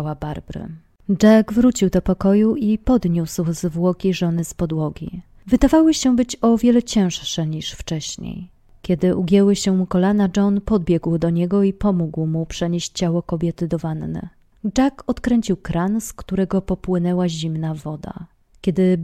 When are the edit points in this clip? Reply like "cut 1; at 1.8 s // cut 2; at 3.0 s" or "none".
none